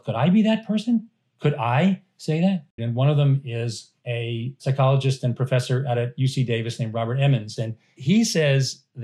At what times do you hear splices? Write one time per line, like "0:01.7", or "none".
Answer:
0:02.8
0:07.6